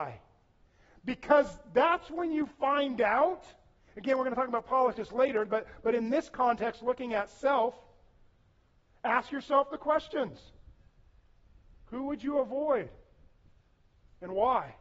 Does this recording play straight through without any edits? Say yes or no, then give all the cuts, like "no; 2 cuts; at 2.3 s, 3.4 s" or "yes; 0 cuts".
no; 1 cut; at 3.9 s